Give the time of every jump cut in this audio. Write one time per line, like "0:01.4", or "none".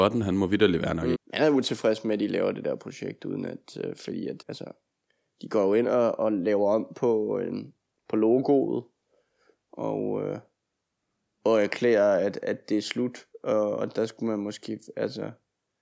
0:01.2
0:04.4